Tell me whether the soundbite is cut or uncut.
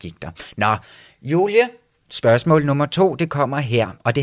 uncut